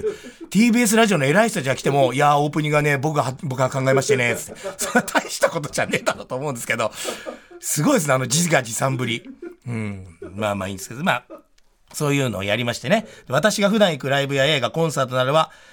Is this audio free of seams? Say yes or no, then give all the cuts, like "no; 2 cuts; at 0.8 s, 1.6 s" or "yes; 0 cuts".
yes; 0 cuts